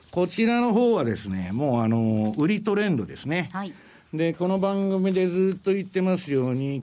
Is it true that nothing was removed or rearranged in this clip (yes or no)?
yes